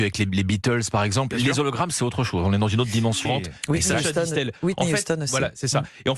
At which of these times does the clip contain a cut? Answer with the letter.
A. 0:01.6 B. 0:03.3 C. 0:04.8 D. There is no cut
B